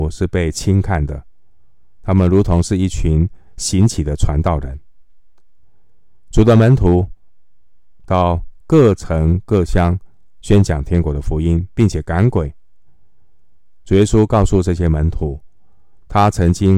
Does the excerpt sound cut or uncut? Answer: uncut